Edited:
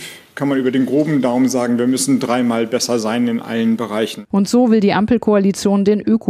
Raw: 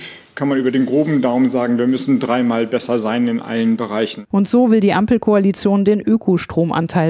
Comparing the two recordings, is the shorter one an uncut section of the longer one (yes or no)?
yes